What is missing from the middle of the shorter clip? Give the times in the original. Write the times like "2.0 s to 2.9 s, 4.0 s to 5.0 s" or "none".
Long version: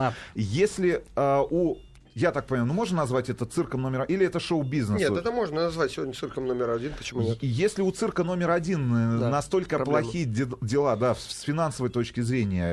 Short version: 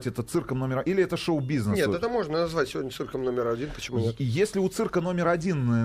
none